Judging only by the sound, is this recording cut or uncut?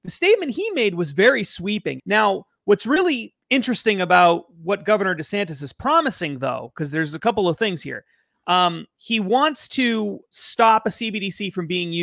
cut